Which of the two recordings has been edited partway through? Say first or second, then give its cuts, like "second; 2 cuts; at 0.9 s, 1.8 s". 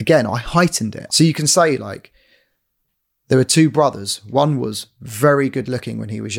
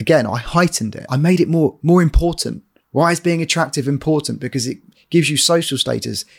first; 1 cut; at 1.1 s